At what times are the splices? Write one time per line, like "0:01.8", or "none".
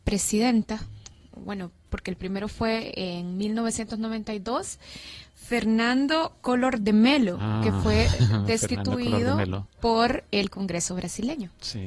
none